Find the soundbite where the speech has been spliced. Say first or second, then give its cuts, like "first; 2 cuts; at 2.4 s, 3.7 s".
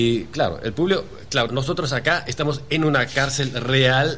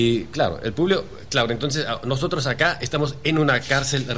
first; 1 cut; at 1.5 s